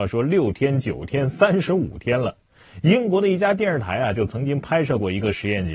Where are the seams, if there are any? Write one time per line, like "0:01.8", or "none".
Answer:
none